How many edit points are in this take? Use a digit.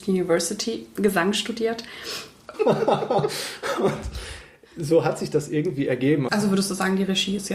2